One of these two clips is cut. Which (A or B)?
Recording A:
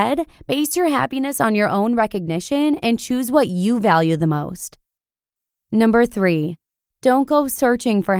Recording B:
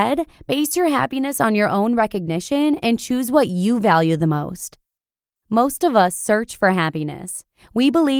B